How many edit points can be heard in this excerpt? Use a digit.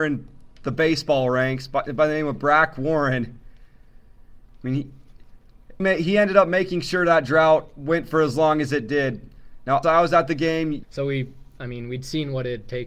3